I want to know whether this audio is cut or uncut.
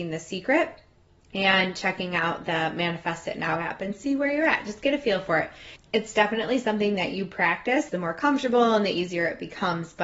cut